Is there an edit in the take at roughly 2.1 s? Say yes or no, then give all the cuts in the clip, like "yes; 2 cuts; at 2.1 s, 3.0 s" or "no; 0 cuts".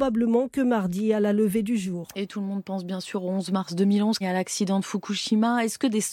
no; 1 cut; at 4.2 s